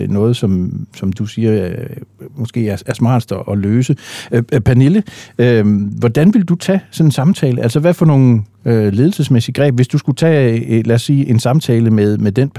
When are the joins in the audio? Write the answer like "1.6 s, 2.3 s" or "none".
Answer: none